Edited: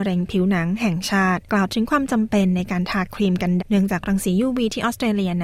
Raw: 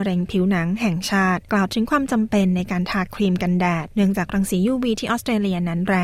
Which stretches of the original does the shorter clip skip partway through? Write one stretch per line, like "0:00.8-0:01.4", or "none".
0:03.6-0:03.8